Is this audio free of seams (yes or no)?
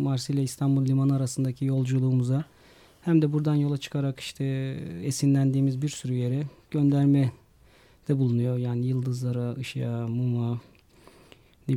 yes